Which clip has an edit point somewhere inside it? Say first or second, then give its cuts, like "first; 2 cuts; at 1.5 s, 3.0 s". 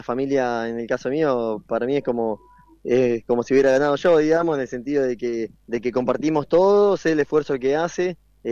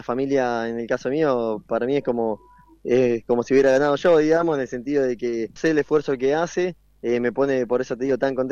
second; 1 cut; at 5.6 s